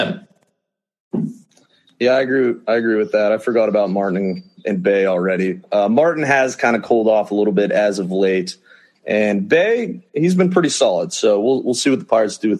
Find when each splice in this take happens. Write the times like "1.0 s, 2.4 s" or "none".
none

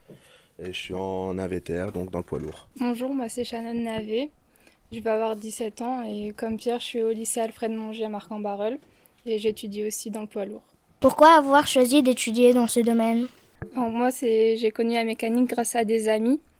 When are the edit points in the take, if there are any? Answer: none

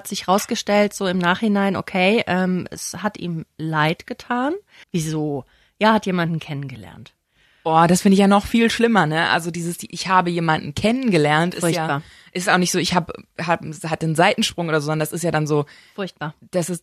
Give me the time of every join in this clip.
4.8 s

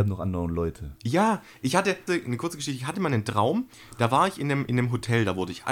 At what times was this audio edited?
2.1 s

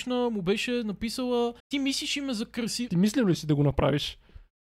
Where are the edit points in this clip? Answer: 1.6 s, 2.9 s

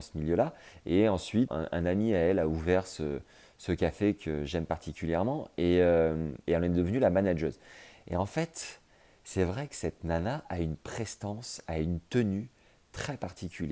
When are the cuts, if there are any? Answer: 1.5 s

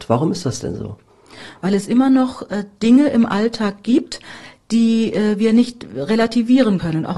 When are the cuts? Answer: none

